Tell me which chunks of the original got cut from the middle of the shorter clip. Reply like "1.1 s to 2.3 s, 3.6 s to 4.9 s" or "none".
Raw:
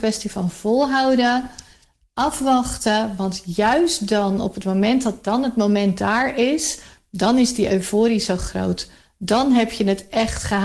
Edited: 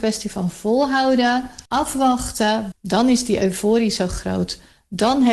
1.7 s to 2.1 s, 3.2 s to 7.0 s